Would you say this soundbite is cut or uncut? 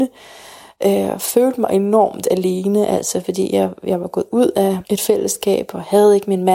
cut